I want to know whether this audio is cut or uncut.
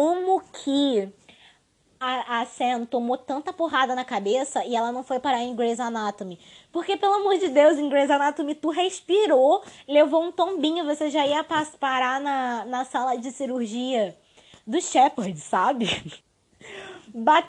cut